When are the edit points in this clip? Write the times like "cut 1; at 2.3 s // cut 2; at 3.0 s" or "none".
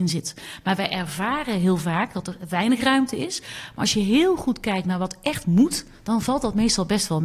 none